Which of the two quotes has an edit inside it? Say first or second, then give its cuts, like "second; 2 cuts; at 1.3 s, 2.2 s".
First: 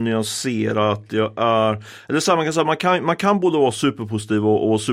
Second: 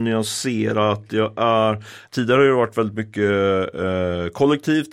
second; 1 cut; at 2.1 s